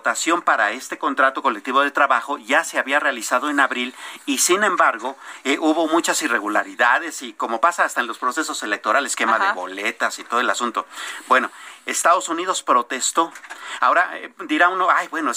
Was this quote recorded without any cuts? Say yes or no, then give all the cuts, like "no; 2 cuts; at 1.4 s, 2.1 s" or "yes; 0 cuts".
yes; 0 cuts